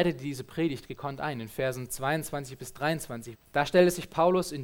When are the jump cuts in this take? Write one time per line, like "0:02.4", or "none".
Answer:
0:03.3